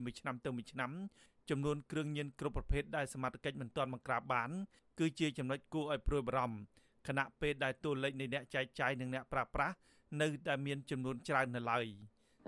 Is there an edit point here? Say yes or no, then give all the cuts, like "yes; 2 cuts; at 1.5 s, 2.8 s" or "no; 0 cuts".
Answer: no; 0 cuts